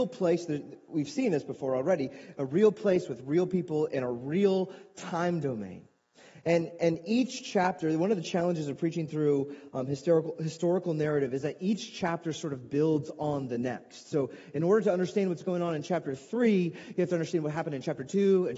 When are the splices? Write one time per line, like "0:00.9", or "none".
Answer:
none